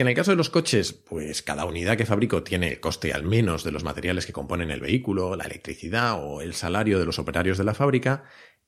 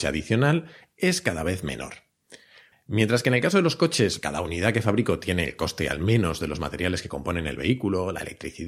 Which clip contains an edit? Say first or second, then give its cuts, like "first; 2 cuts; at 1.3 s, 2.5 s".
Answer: second; 2 cuts; at 2.7 s, 4.2 s